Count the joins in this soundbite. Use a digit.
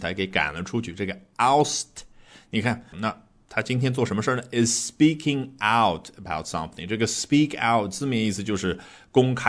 1